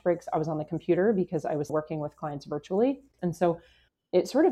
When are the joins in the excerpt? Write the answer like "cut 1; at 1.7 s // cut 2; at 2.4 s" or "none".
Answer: cut 1; at 1.7 s // cut 2; at 3.2 s

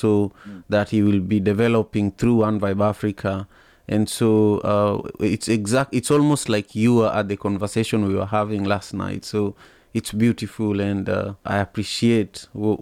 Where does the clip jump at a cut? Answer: cut 1; at 11.4 s

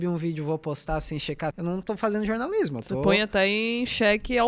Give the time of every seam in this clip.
cut 1; at 1.5 s

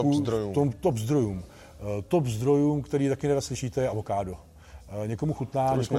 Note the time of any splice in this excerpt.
none

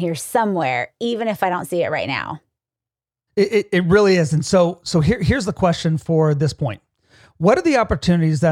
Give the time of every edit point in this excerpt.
none

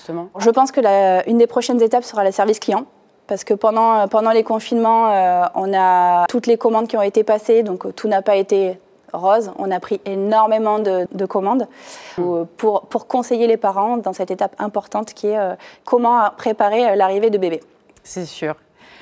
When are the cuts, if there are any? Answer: cut 1; at 6.3 s // cut 2; at 11.1 s // cut 3; at 12.2 s

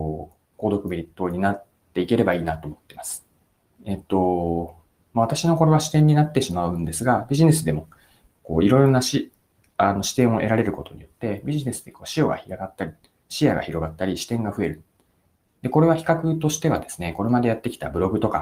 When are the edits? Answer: cut 1; at 3.8 s // cut 2; at 15.4 s

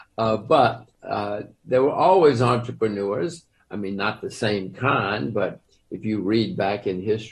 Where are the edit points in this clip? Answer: none

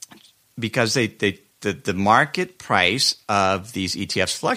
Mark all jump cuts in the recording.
none

